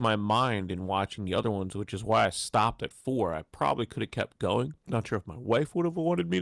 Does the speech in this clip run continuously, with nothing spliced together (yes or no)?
yes